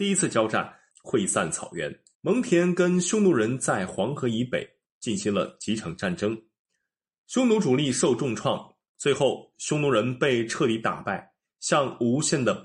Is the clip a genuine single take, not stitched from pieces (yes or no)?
no